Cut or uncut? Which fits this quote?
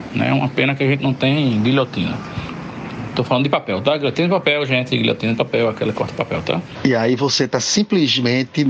uncut